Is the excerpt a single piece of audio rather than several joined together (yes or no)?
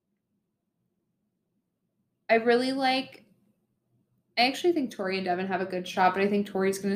yes